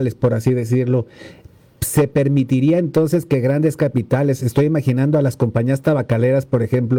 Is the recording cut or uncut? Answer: uncut